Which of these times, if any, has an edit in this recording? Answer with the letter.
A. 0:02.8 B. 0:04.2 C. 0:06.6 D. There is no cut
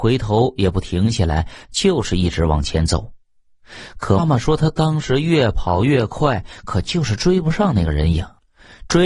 B